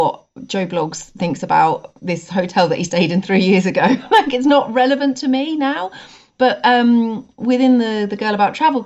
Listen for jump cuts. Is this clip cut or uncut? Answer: uncut